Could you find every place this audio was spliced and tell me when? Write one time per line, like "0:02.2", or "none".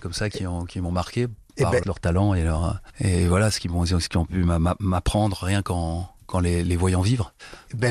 0:01.8